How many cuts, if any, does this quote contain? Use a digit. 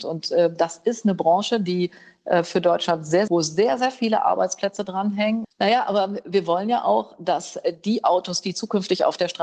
2